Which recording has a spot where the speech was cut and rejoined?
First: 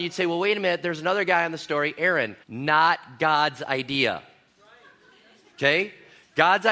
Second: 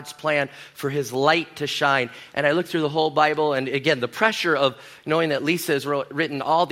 first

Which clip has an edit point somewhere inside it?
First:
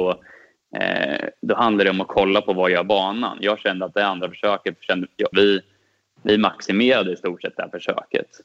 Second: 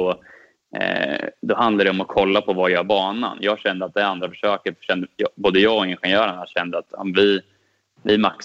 first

